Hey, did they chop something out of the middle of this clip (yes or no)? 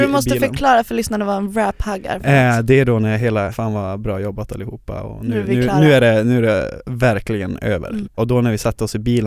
yes